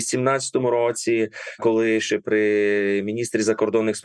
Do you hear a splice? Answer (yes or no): no